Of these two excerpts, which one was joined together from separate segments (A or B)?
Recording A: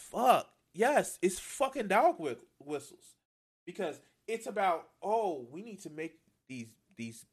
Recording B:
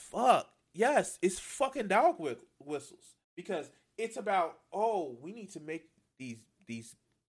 B